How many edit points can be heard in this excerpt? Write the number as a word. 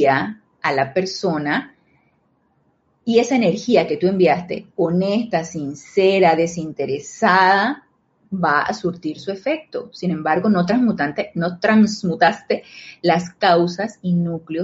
zero